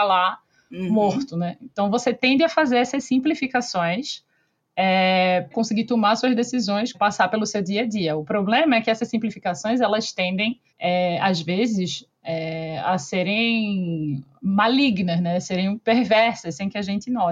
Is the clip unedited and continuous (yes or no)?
no